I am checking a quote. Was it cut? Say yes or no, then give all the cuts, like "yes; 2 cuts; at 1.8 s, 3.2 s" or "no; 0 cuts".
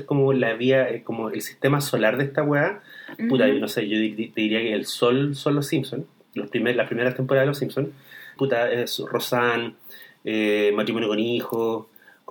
yes; 1 cut; at 8.4 s